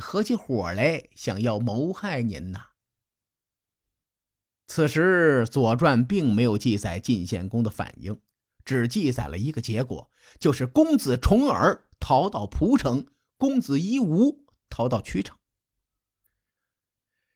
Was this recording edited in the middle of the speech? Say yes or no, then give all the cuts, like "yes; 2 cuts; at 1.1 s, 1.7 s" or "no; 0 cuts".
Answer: no; 0 cuts